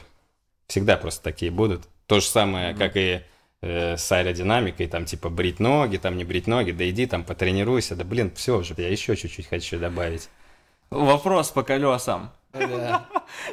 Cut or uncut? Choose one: cut